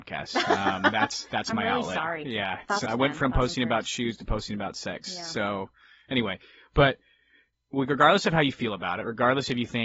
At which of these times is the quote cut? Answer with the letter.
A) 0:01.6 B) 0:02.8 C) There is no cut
B